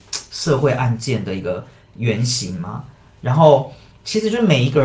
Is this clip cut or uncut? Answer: uncut